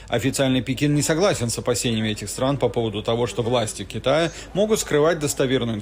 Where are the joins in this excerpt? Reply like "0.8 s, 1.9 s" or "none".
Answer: none